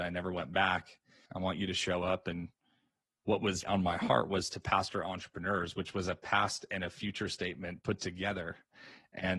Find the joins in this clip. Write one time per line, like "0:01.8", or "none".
0:01.3
0:03.6